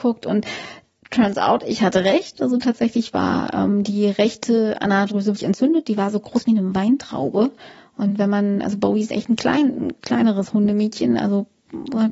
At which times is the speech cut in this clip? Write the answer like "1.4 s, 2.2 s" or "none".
5.3 s